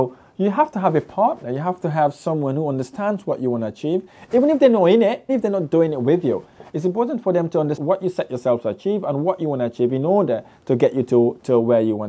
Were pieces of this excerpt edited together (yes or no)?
yes